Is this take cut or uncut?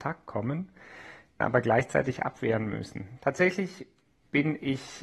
cut